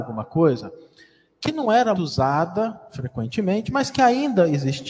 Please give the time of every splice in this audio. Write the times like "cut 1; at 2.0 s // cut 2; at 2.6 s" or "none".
cut 1; at 1.9 s